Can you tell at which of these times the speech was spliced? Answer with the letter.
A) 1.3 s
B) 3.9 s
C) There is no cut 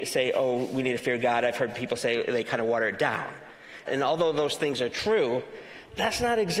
B